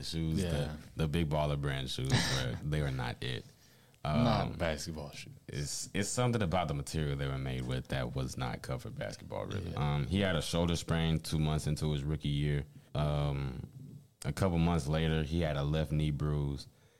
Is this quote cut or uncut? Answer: cut